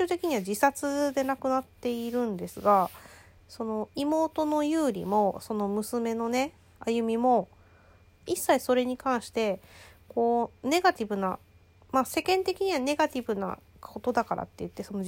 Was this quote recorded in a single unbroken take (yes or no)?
yes